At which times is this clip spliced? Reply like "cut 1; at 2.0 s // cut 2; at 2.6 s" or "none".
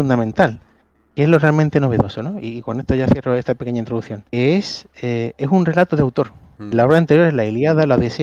cut 1; at 4.3 s